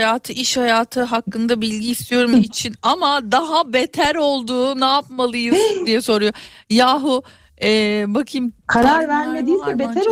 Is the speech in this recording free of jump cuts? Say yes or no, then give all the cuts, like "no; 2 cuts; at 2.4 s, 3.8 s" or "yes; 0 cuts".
no; 1 cut; at 2.3 s